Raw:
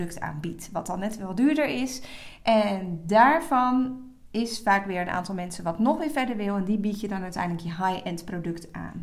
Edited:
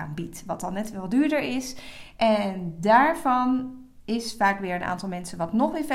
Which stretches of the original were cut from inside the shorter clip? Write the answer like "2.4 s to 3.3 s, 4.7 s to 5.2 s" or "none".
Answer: none